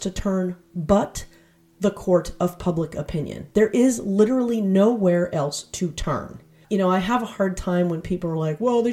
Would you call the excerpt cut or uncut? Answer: uncut